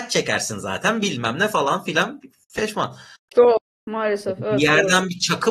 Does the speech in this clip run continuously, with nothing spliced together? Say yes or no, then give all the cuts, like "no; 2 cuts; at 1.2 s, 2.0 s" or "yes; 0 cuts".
no; 1 cut; at 3.3 s